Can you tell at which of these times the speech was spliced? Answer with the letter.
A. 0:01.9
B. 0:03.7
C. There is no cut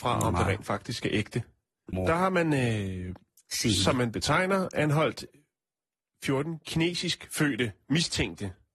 A